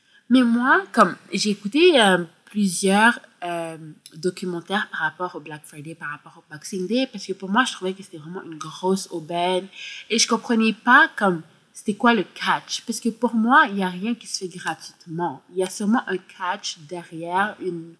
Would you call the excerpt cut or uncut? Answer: uncut